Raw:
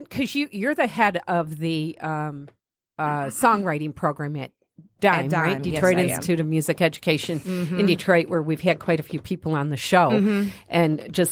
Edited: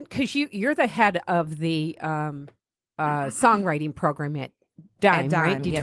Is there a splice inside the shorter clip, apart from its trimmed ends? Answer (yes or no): no